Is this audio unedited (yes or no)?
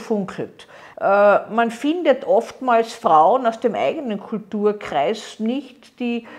no